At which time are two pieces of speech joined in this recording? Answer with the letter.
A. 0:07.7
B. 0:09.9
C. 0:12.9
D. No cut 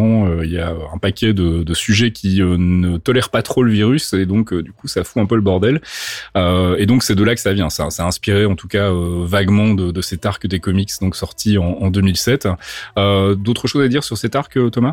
D